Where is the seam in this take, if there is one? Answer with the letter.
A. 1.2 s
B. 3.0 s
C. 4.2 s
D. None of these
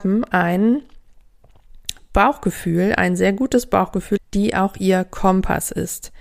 C